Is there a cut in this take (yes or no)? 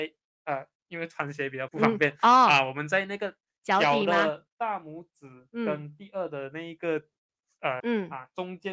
yes